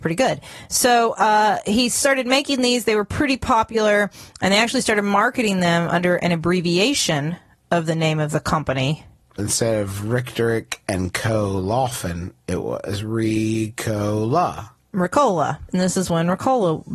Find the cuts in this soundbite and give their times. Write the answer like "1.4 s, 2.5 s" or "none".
9.4 s